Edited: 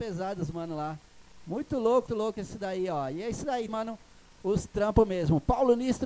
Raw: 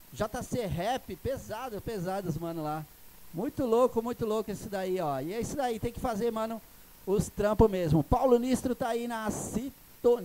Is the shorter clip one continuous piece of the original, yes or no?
no